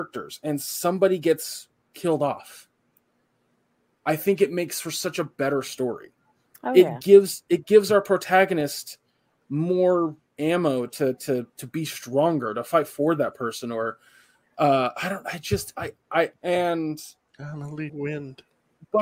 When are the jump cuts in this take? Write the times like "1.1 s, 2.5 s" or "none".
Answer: 16.3 s, 17.9 s